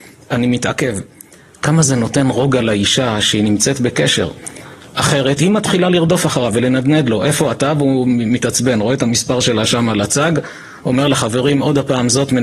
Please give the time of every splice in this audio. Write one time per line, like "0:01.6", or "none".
none